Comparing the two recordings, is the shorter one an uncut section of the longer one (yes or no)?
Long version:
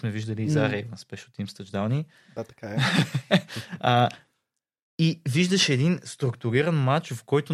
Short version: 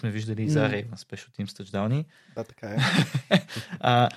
yes